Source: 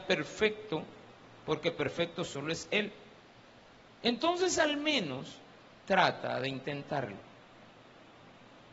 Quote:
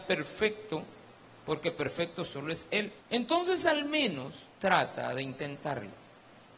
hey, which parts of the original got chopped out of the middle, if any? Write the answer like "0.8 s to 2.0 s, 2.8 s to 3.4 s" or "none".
3.0 s to 3.9 s, 5.5 s to 5.8 s